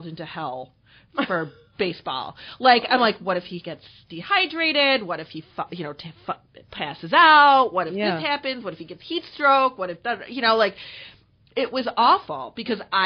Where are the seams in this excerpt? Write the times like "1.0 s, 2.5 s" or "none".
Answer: none